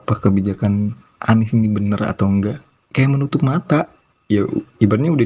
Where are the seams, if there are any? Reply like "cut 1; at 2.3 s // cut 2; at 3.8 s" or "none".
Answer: none